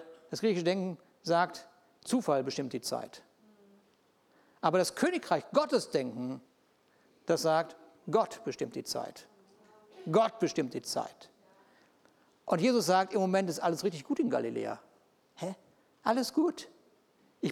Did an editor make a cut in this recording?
no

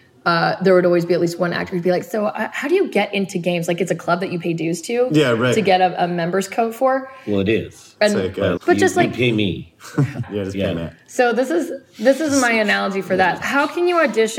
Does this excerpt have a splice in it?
yes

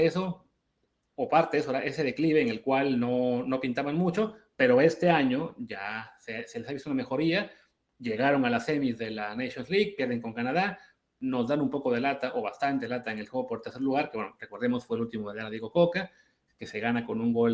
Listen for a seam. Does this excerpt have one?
no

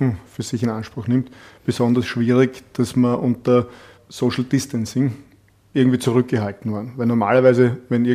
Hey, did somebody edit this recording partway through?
no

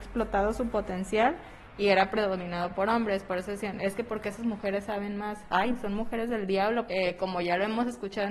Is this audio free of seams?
no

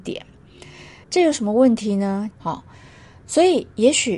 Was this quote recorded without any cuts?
no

